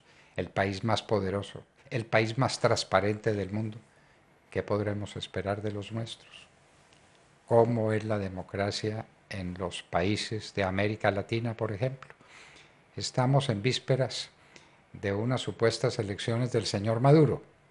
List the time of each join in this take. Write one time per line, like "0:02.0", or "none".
0:01.8